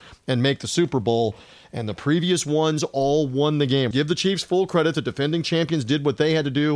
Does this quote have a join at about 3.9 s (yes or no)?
yes